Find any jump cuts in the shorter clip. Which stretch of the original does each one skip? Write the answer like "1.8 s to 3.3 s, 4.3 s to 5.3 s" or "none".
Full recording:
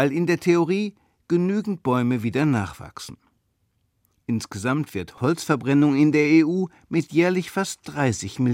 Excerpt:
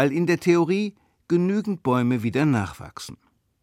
none